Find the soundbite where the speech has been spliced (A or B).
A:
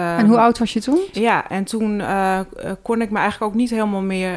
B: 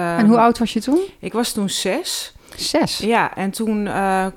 A